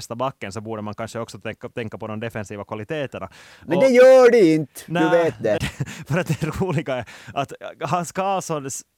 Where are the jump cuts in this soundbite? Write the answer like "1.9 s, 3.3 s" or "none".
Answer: 5.6 s

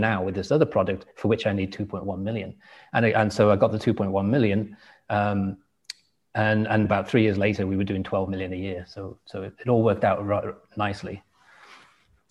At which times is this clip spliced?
6.9 s

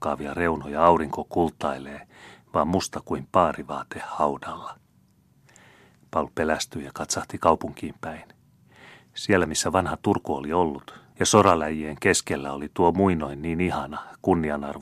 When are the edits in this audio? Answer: 11.1 s

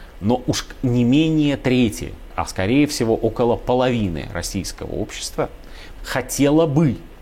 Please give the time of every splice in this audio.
2.3 s, 6.0 s

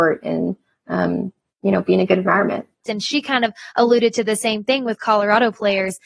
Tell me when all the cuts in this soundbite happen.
2.8 s

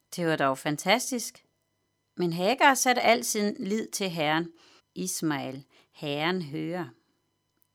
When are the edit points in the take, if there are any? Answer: 2.1 s, 4.8 s

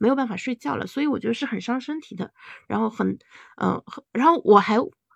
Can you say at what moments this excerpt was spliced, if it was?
none

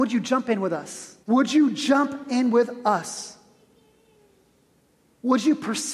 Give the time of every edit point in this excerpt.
1.2 s

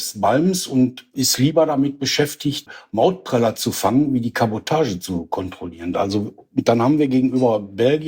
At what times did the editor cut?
5.9 s

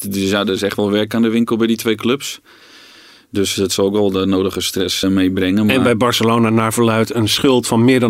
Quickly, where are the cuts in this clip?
5.0 s

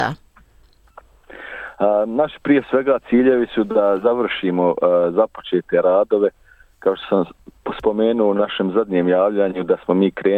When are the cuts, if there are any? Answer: none

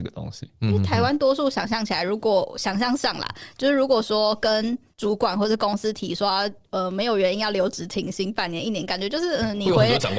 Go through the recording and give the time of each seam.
none

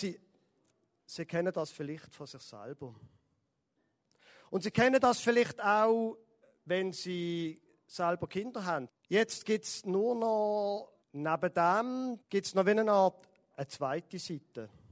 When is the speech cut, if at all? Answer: 8.9 s, 11.0 s, 12.2 s

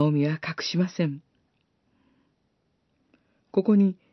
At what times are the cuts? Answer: none

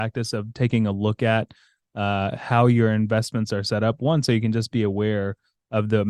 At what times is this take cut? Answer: none

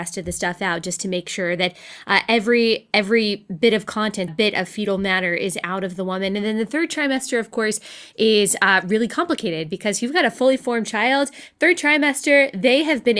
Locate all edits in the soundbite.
4.3 s

